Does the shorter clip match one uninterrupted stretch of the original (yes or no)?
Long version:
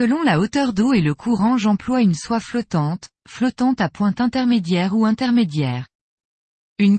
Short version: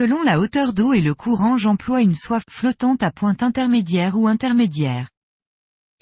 no